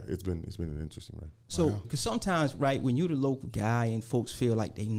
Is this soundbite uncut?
no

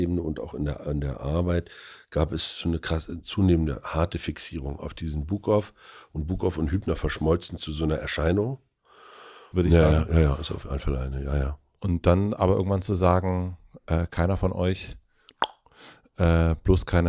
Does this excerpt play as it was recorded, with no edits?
no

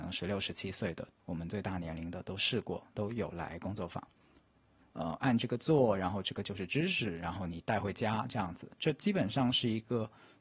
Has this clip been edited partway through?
yes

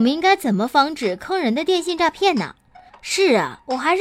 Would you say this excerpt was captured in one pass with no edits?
no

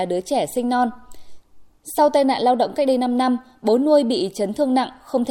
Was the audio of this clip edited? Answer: no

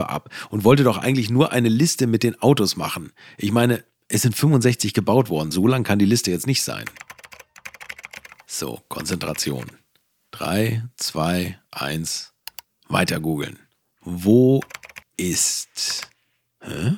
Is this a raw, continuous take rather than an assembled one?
yes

